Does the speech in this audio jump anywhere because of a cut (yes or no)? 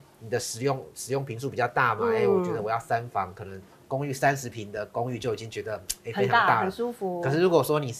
no